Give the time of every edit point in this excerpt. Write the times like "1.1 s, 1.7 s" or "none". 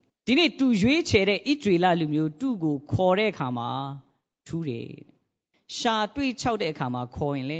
none